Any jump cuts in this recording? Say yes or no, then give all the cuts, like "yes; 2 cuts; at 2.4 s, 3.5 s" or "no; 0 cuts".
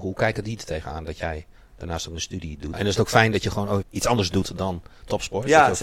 yes; 2 cuts; at 2.7 s, 3.8 s